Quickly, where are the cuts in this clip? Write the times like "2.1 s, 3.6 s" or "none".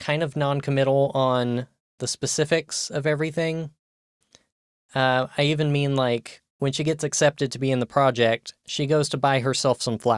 none